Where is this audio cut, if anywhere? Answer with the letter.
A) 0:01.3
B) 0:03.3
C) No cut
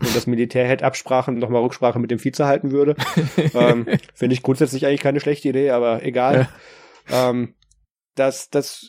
A